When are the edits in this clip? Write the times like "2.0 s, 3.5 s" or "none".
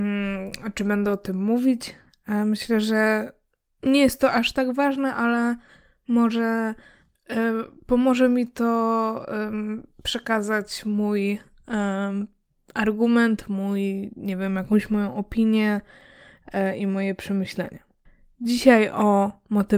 none